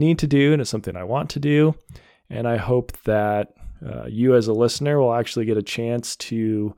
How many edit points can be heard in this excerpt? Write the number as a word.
zero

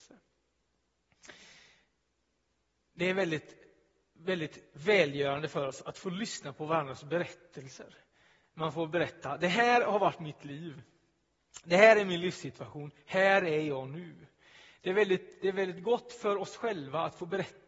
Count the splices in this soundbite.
zero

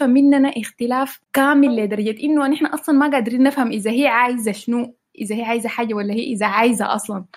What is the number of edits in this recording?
one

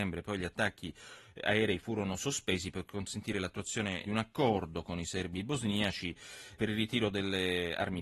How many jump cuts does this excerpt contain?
two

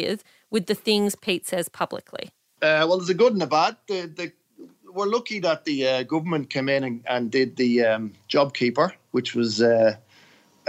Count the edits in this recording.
one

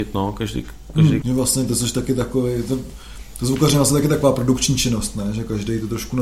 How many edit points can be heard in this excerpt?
one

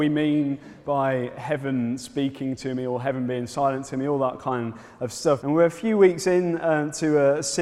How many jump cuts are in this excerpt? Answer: one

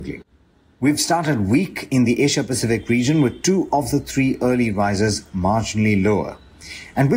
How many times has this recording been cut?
zero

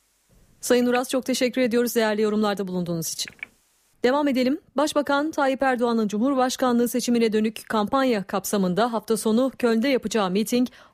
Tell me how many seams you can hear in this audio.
one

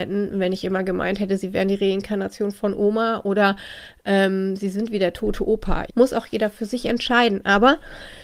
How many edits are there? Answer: one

